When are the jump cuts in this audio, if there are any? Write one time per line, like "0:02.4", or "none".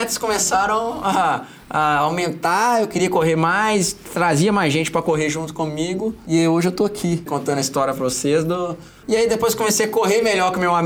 0:07.3
0:09.0